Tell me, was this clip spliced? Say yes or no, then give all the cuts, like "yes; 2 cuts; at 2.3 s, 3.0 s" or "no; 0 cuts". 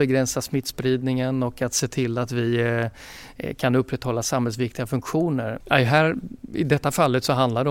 yes; 1 cut; at 5.6 s